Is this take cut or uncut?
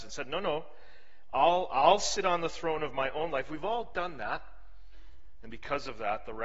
uncut